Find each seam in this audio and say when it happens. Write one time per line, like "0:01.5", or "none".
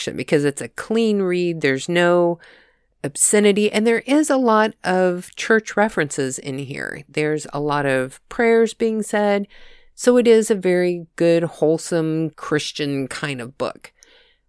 0:12.3

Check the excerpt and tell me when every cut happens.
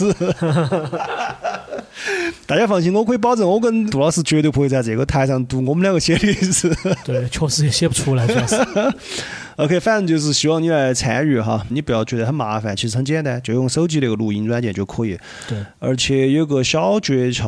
0:11.7

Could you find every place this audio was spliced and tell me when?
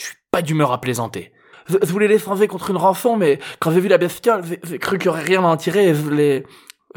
0:01.5

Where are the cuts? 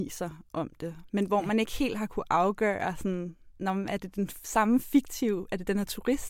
none

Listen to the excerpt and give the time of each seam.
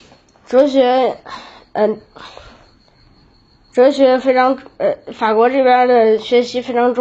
none

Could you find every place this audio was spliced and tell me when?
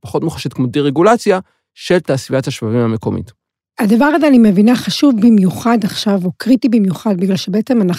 none

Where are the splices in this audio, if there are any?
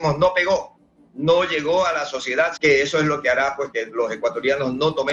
0:02.6
0:03.7

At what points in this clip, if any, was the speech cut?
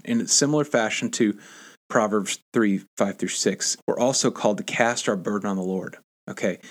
0:03.8

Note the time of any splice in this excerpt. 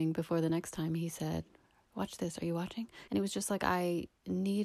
0:01.8
0:03.1

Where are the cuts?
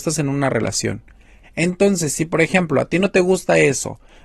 0:01.4

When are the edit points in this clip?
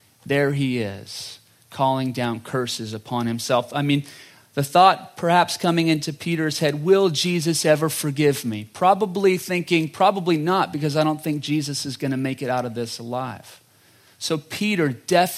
none

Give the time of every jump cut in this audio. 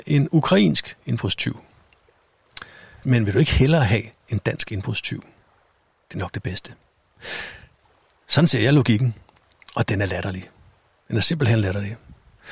0:03.0

